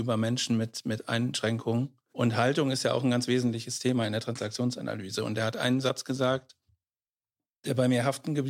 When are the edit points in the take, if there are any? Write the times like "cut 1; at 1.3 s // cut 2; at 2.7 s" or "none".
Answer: none